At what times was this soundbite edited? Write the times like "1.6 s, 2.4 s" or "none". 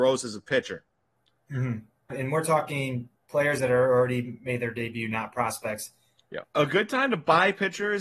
2.1 s, 6.4 s